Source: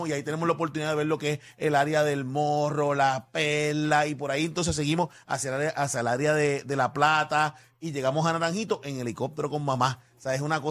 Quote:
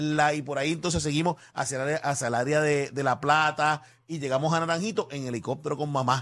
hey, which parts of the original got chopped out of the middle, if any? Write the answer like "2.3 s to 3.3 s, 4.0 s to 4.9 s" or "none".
none

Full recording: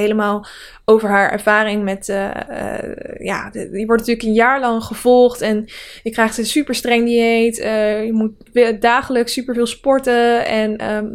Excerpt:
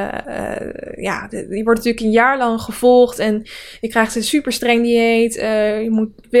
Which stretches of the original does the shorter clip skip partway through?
none

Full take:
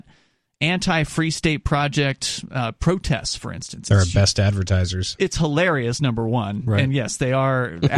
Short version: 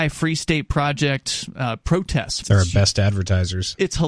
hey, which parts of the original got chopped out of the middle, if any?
3.4 s to 3.8 s

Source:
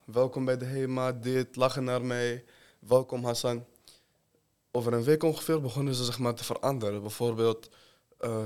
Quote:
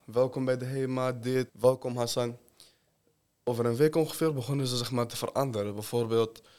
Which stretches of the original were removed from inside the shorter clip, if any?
1.5 s to 2.8 s

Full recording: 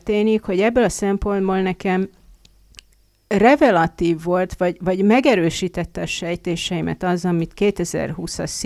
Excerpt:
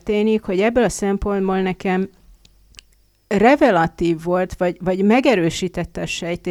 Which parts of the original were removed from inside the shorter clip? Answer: none

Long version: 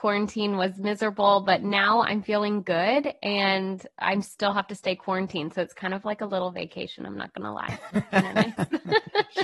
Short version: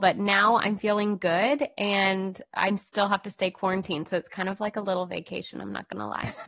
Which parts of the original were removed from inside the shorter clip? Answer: none

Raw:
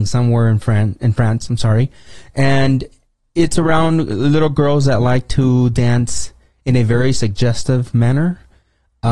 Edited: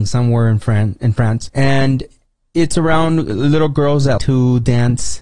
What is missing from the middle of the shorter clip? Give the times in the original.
1.5 s to 2.3 s, 5.0 s to 5.3 s

